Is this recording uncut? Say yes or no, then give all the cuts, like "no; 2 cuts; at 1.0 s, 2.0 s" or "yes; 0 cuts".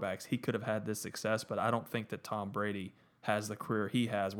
yes; 0 cuts